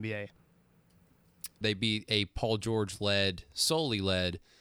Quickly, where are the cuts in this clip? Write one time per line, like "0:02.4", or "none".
0:01.6

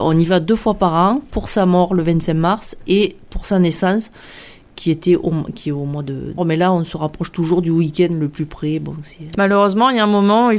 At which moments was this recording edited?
0:06.4
0:09.3

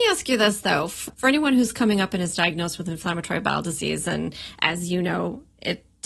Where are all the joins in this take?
none

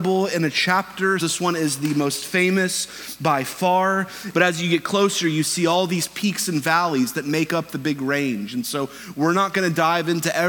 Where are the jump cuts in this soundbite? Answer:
0:01.2
0:04.3

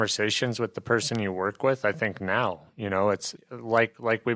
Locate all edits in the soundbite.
0:03.4

